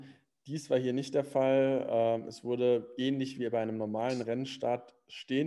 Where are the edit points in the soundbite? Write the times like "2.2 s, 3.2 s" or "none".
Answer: none